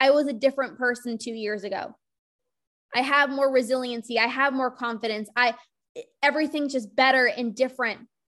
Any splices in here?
no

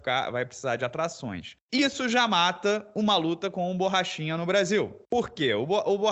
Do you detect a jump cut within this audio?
no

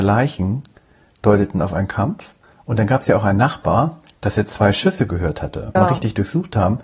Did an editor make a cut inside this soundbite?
yes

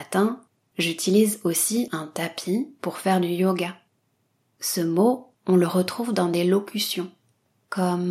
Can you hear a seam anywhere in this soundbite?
no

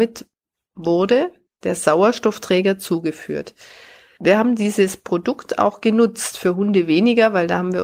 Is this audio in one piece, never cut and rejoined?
yes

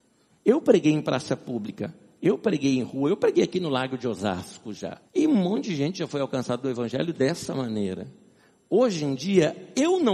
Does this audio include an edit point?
yes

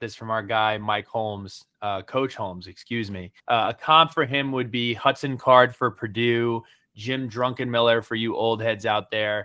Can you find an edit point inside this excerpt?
yes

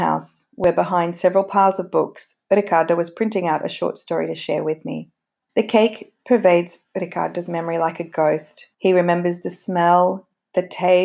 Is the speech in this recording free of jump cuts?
no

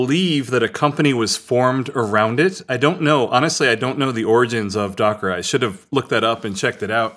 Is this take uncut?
yes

